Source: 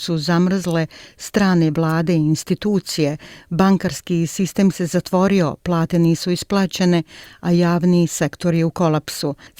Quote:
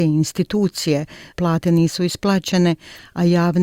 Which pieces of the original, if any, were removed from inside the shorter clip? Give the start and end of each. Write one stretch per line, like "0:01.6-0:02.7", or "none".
0:03.4-0:05.6